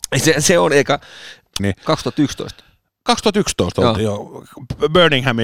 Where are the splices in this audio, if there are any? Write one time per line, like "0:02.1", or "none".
0:01.6